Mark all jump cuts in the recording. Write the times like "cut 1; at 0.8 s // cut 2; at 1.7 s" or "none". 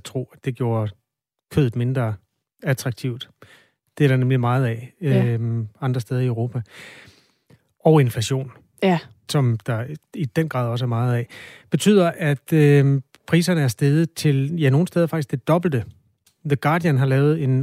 none